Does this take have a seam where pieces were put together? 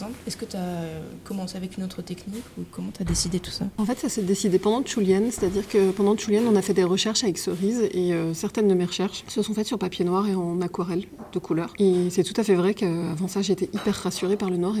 no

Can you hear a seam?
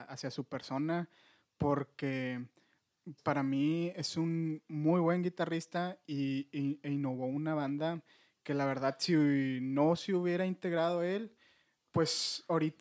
yes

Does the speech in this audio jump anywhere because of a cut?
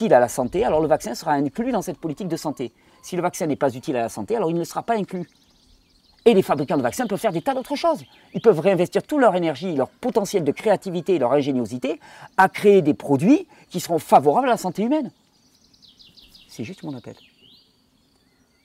no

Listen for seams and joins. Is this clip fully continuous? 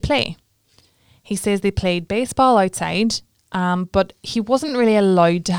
yes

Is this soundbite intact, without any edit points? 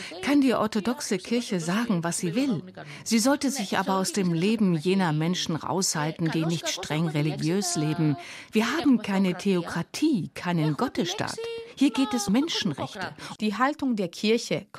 no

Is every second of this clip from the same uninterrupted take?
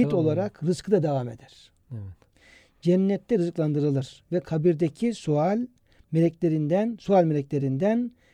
yes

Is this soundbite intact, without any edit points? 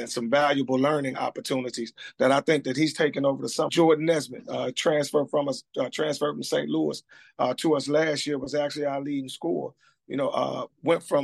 no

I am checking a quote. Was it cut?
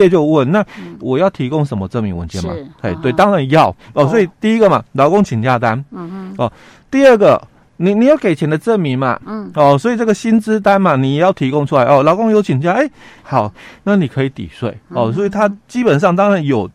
yes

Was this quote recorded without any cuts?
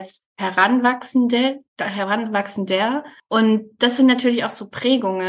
yes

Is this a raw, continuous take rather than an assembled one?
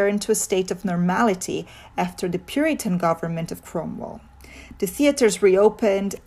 yes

